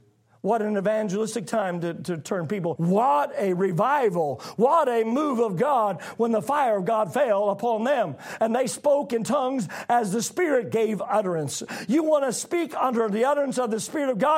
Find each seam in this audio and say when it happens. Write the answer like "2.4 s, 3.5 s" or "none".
2.8 s

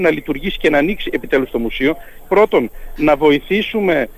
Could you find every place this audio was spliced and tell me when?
2.2 s

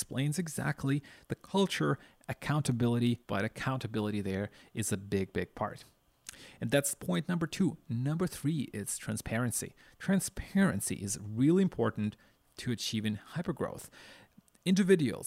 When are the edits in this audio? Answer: 3.2 s

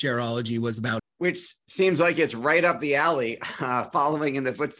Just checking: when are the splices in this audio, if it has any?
1.0 s

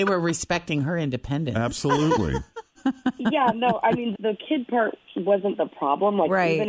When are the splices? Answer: 2.7 s, 4.1 s

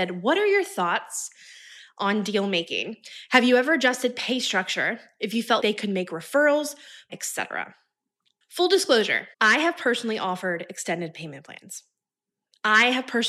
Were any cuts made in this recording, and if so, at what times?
5.6 s, 7.1 s, 9.3 s

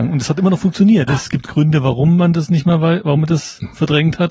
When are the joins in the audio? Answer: 1.1 s

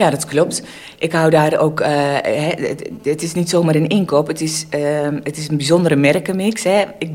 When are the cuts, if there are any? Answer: none

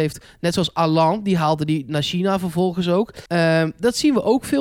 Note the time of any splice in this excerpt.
3.3 s

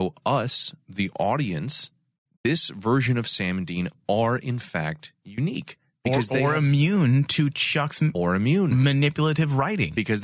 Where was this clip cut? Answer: 2.3 s

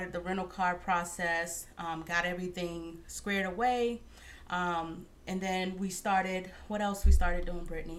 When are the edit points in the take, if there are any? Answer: none

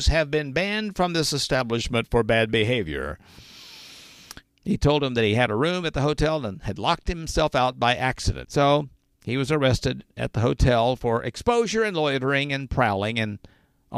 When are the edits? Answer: 4.4 s, 8.4 s

